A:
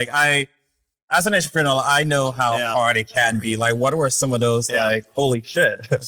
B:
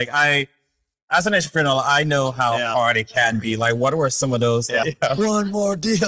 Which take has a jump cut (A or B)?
B